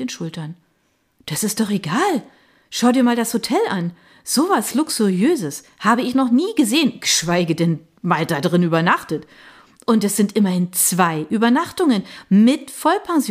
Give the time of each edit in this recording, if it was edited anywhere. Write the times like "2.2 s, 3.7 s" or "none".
none